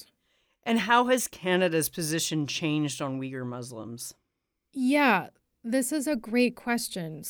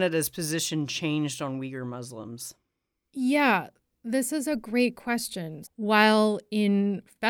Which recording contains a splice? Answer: second; 1 cut; at 5.6 s

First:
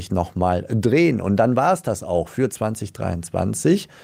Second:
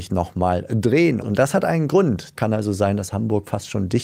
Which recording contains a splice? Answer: second; 2 cuts; at 1.2 s, 2.3 s

